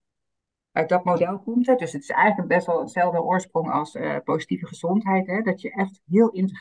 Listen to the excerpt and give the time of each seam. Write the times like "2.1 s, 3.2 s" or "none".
none